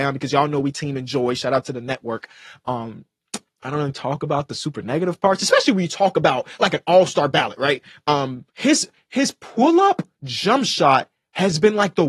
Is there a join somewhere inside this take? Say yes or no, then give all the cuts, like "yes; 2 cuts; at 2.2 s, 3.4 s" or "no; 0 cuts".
yes; 2 cuts; at 8.5 s, 10.1 s